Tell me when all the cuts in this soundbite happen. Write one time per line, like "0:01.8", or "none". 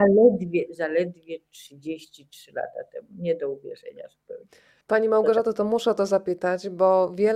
0:04.8